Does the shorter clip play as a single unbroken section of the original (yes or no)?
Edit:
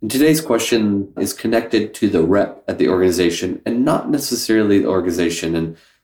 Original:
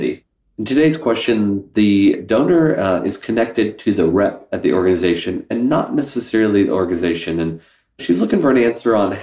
no